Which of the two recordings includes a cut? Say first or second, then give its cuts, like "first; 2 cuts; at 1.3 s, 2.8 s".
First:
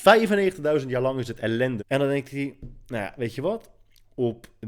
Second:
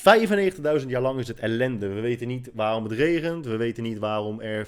first; 1 cut; at 1.8 s